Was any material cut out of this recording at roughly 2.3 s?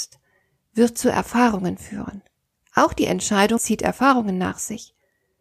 no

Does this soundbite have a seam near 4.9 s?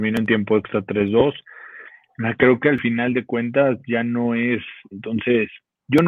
yes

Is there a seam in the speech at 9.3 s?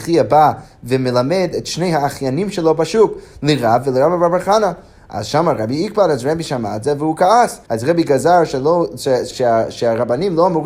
yes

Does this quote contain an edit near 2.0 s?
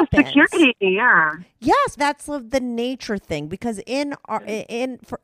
yes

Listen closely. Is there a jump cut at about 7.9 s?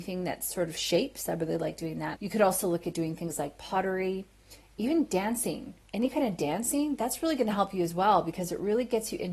no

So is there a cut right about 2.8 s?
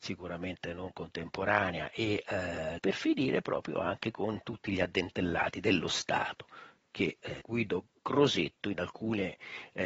yes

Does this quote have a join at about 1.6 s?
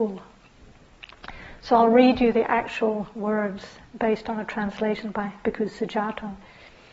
no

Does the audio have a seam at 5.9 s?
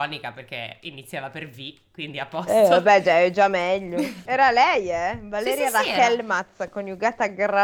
no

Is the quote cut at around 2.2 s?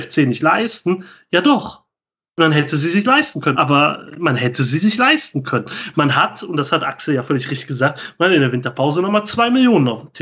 no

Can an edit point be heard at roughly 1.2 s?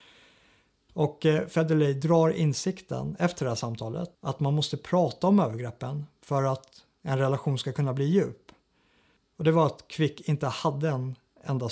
no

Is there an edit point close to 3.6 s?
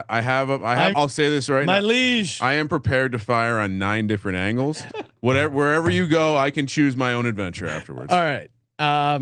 no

